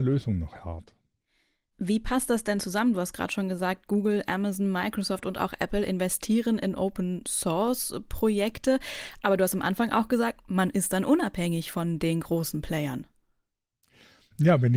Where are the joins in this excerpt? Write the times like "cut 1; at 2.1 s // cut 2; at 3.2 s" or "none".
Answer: none